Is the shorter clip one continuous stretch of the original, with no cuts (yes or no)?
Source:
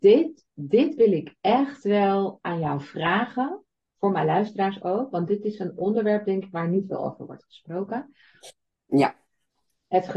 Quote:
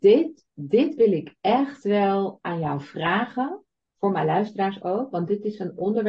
yes